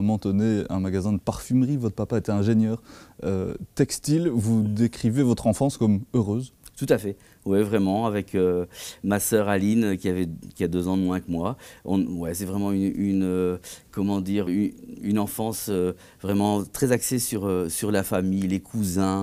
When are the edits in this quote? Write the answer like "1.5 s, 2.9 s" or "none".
14.5 s

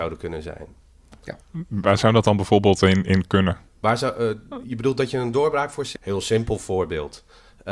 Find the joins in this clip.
3.7 s, 6.0 s

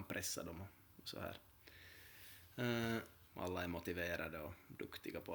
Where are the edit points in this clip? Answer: 3.3 s

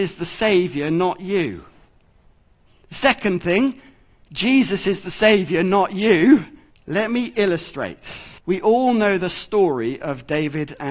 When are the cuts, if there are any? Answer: 6.7 s, 8.4 s

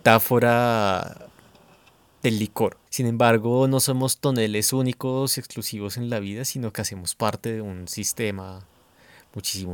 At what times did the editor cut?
2.9 s

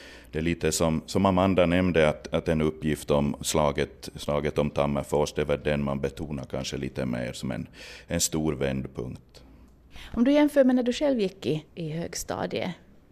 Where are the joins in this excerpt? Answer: 11.7 s

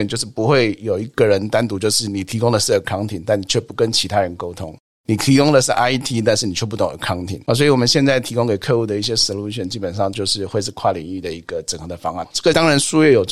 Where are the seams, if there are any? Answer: 7.5 s, 12.2 s

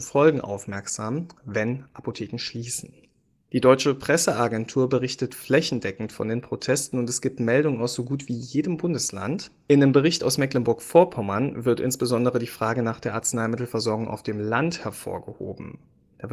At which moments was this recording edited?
none

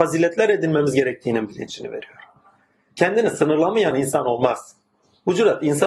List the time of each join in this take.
3.9 s

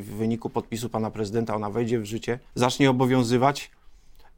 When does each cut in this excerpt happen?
2.5 s

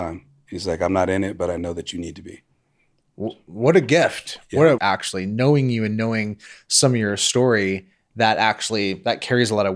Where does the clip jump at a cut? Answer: 4.8 s

